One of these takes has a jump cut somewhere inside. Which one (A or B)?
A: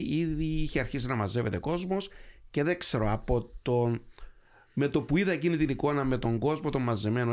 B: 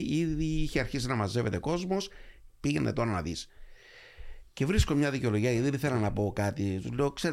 B